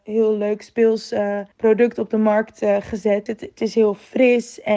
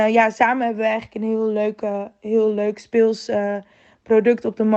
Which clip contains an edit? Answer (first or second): first